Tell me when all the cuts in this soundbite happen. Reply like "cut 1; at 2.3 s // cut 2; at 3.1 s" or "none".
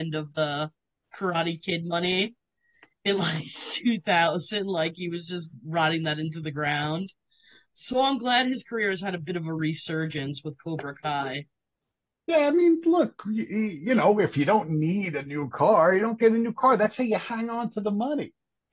none